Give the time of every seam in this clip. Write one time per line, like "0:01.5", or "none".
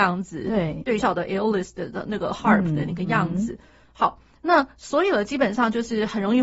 0:01.0